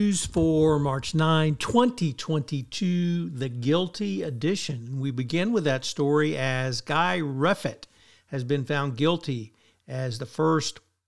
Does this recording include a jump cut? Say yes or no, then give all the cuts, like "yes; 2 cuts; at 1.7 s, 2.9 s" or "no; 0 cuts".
no; 0 cuts